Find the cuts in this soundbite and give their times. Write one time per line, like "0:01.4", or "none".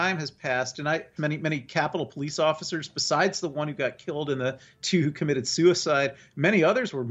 0:01.2

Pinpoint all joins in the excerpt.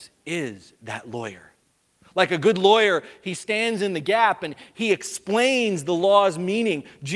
none

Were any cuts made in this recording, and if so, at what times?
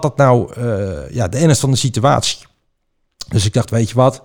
none

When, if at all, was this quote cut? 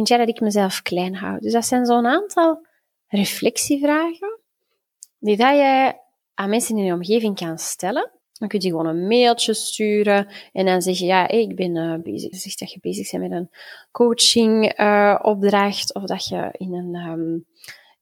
0:08.2
0:12.3

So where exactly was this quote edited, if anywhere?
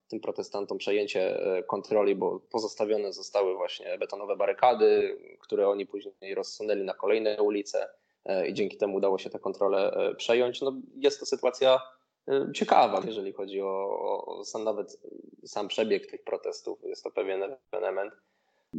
0:13.0

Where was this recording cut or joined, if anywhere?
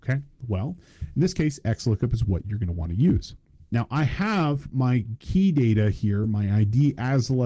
none

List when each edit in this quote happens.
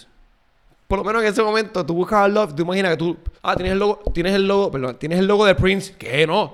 0:03.4

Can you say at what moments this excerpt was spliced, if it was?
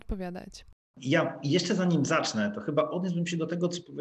0:00.9

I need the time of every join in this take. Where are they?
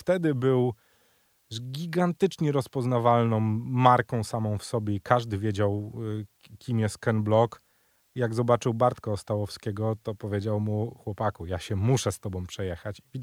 none

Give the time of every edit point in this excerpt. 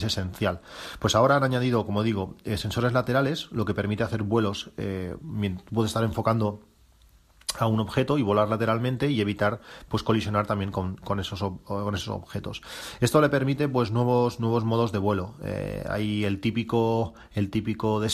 none

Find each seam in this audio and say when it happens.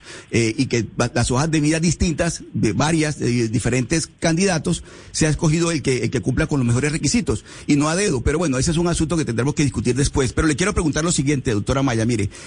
none

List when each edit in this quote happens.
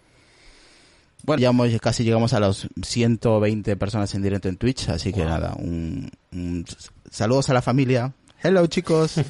0:01.4

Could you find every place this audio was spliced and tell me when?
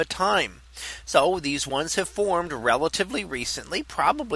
none

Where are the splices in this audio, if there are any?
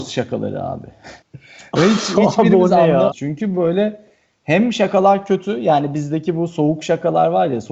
0:01.2
0:03.1

